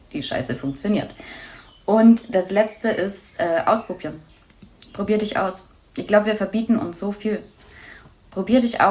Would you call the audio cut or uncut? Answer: uncut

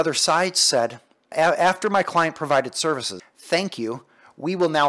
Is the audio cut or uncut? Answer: cut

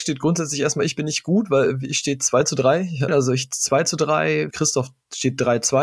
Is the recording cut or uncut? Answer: cut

